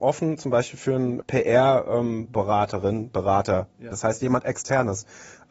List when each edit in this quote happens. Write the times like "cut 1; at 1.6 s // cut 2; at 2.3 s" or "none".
cut 1; at 1.2 s // cut 2; at 3.9 s